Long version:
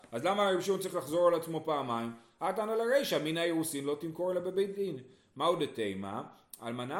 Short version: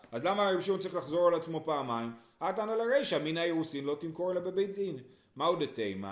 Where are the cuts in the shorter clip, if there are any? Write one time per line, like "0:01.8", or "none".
none